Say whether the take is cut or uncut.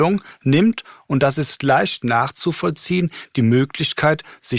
uncut